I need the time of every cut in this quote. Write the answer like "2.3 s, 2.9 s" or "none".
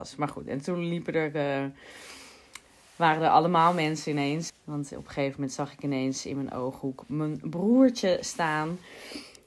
4.5 s